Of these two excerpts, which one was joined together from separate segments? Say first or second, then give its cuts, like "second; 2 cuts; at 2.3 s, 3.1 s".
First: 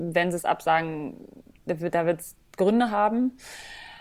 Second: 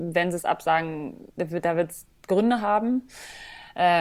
second; 1 cut; at 1.3 s